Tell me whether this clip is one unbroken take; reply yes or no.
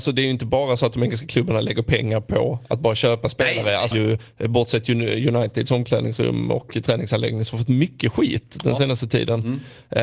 no